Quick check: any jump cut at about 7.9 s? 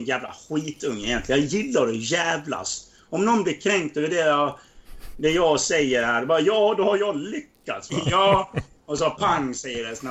yes; 1 cut; at 7.9 s

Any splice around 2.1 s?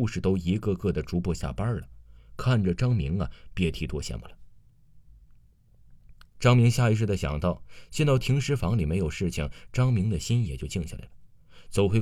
no; 1 cut; at 6.2 s

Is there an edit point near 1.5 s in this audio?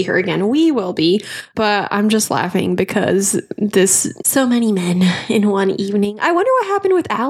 yes; 2 cuts; at 1.5 s, 4.2 s

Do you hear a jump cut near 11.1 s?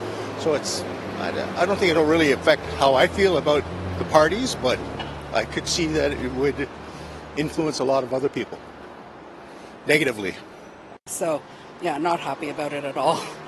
yes; 1 cut; at 11.1 s

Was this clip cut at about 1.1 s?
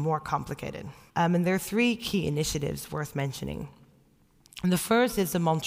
yes; 1 cut; at 1.1 s

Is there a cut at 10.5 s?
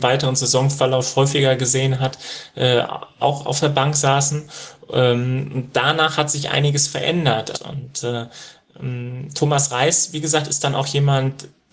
no; 1 cut; at 7.5 s

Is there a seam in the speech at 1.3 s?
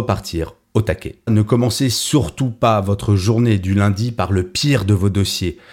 yes; 1 cut; at 1.3 s

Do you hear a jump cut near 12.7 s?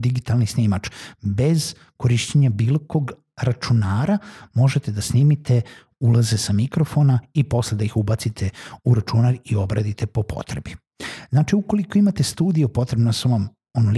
no; 0 cuts

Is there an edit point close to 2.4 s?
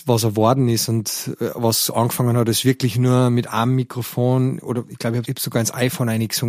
no; 1 cut; at 5.2 s

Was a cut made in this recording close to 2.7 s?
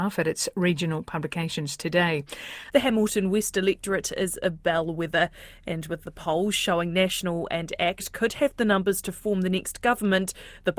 yes; 1 cut; at 2.7 s

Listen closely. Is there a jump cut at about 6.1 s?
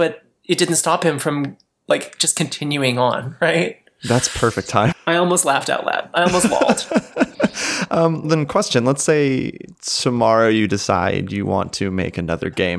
no; 2 cuts; at 4.9 s, 8.2 s

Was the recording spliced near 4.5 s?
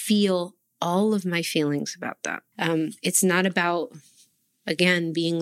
no; 1 cut; at 2.5 s

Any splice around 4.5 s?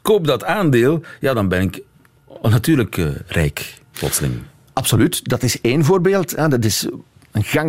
no; 0 cuts

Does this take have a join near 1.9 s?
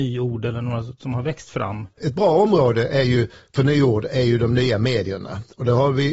yes; 1 cut; at 1.9 s

